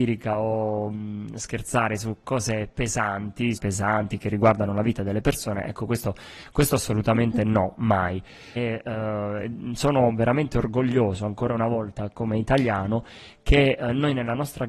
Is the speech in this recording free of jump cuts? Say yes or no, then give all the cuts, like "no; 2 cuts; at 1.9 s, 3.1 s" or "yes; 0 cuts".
no; 2 cuts; at 3.6 s, 8.6 s